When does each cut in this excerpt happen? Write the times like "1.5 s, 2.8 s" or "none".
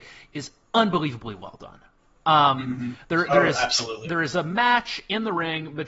none